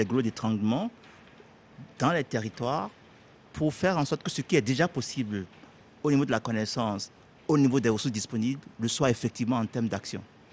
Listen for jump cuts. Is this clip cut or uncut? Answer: uncut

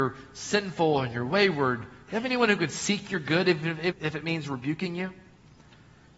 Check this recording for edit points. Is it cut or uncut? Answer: cut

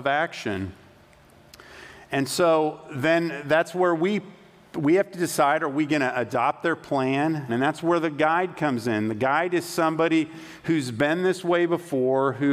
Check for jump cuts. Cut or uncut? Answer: cut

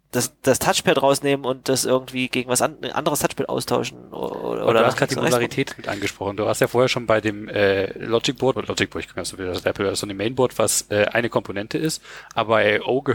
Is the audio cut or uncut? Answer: cut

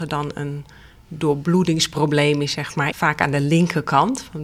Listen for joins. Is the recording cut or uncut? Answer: cut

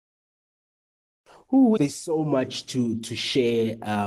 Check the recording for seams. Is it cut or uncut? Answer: cut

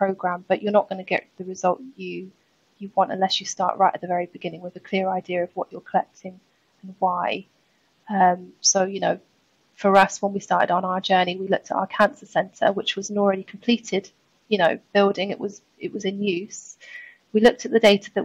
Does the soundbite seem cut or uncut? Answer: uncut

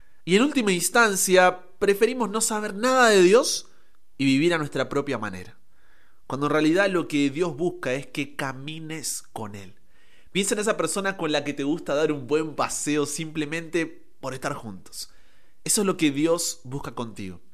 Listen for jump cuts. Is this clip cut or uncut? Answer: uncut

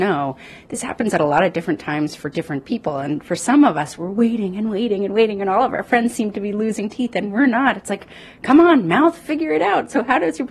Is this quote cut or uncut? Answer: uncut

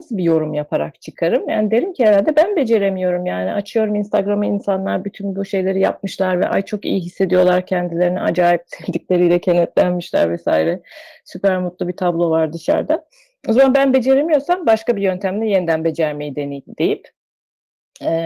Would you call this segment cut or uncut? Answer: uncut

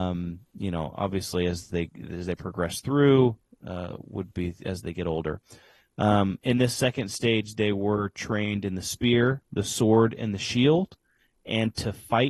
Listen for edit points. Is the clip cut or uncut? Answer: uncut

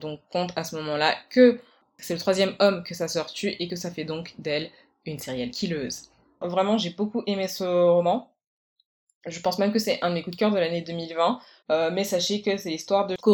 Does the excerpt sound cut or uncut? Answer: cut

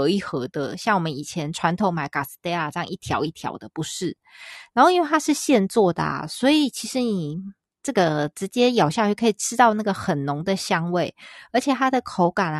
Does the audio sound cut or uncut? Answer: uncut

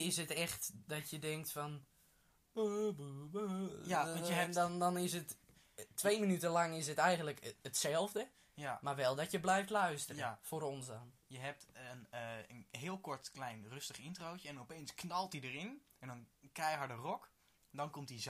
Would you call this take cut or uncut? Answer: uncut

